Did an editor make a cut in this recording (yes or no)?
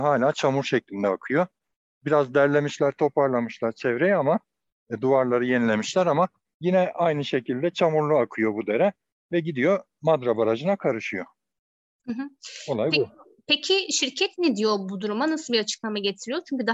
no